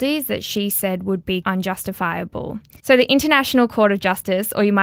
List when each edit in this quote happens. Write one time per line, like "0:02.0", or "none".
0:01.4
0:02.8